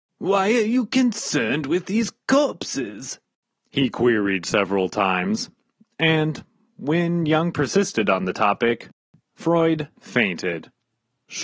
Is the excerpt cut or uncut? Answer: uncut